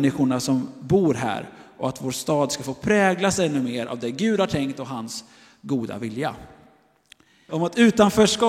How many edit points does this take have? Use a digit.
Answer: 1